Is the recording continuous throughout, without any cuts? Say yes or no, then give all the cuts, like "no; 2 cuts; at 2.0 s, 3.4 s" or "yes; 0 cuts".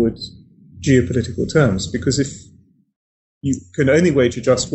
yes; 0 cuts